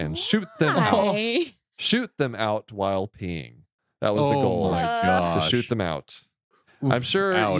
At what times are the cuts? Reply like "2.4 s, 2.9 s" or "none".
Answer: none